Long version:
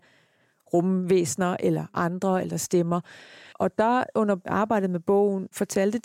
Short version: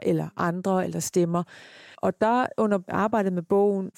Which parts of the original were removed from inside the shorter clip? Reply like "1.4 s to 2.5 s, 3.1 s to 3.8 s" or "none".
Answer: none